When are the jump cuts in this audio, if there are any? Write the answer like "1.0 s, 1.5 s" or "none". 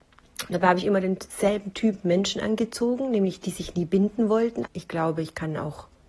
3.4 s, 4.6 s